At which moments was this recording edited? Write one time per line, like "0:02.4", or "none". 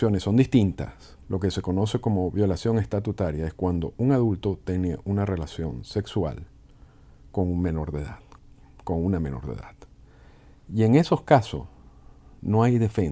0:01.2

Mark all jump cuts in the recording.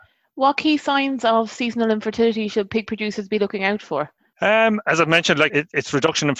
0:05.5

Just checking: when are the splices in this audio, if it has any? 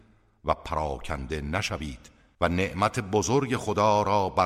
none

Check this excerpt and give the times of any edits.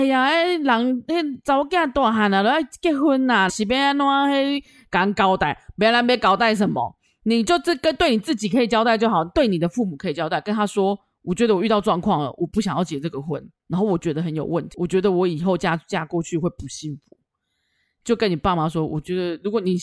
0:03.5

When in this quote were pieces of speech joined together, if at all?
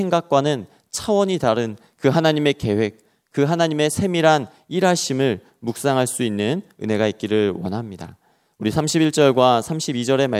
none

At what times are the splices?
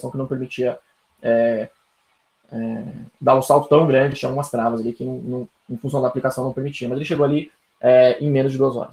none

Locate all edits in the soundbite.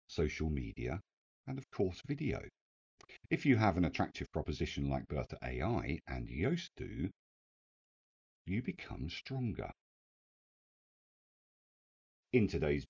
none

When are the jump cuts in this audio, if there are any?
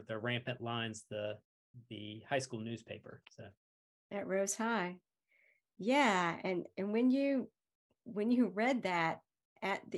none

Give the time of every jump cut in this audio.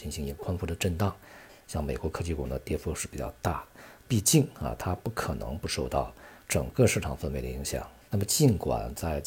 0:01.6
0:04.0
0:08.1

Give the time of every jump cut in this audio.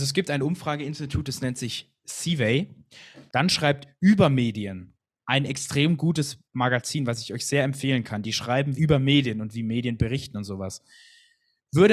0:03.3
0:08.8

